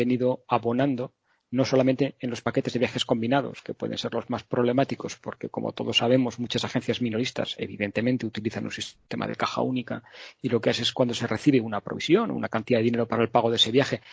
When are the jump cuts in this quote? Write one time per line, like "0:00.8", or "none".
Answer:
none